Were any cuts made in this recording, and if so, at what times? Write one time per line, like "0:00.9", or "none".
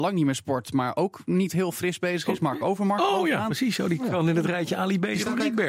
none